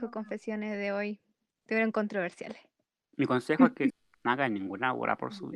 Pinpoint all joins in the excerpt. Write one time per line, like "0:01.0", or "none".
0:03.9